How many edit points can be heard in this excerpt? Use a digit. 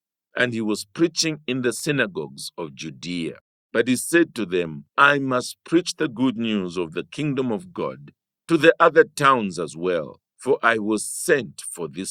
3